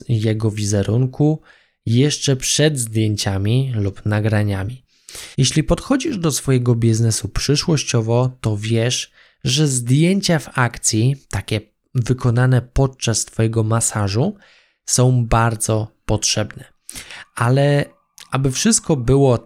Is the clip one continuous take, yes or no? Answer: no